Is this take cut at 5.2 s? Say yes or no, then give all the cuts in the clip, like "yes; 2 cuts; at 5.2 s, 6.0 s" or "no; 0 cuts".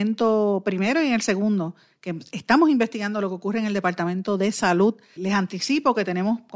yes; 1 cut; at 5.2 s